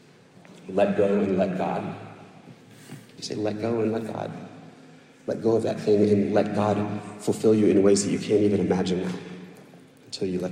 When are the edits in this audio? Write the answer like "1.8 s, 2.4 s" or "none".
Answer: 3.2 s

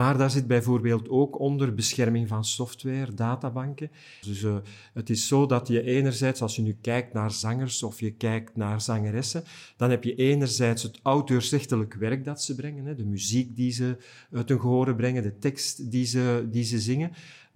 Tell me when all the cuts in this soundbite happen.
4.2 s

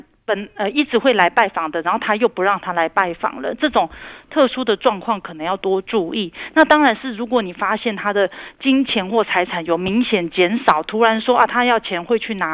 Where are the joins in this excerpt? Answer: none

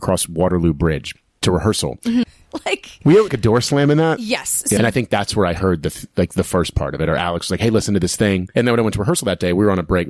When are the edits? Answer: 2.2 s, 3.3 s, 4.8 s

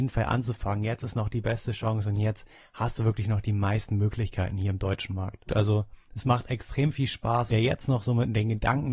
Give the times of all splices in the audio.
5.5 s, 7.5 s

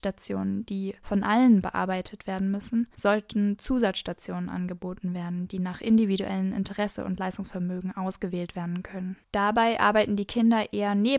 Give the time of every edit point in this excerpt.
9.2 s

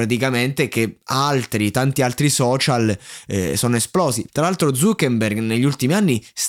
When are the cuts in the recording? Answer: 4.3 s

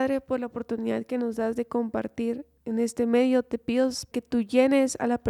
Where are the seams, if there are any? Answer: 2.6 s, 4.1 s

